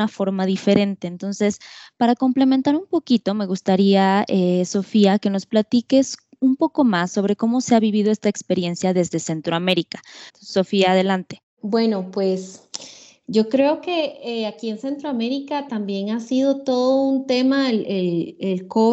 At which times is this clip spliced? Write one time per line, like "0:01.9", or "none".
0:10.3